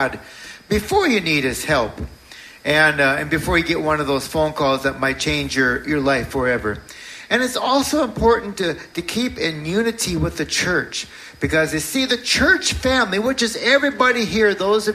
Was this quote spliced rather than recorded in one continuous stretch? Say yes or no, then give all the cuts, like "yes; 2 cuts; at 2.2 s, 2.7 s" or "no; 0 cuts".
no; 0 cuts